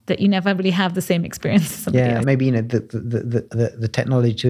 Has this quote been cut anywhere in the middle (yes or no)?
yes